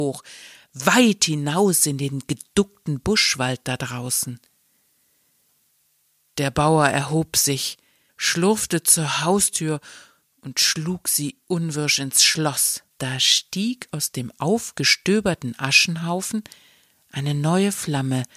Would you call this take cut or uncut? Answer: cut